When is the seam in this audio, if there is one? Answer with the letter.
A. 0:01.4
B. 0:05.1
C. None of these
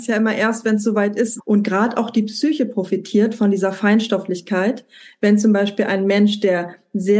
A